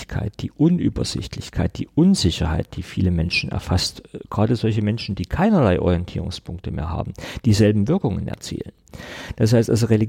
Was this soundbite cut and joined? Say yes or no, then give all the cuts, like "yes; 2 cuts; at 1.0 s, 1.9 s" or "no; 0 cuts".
no; 0 cuts